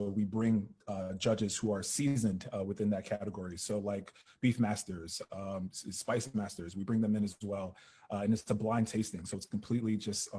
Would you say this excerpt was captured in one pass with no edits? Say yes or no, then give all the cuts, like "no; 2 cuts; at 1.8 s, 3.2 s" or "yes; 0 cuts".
yes; 0 cuts